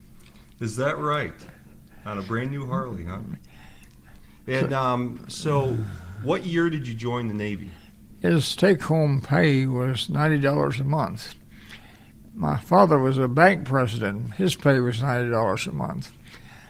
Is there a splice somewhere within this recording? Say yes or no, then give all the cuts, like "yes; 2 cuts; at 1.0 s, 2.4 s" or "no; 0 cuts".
yes; 1 cut; at 8.0 s